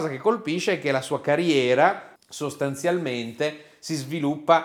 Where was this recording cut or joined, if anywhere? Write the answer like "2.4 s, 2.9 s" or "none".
2.2 s